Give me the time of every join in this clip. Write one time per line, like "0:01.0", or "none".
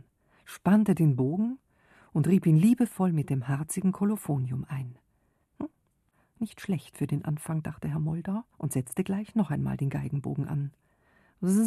0:05.4
0:08.5